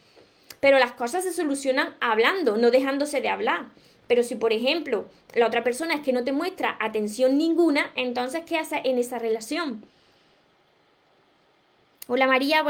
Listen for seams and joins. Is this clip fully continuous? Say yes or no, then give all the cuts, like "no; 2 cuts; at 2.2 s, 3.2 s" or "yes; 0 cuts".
yes; 0 cuts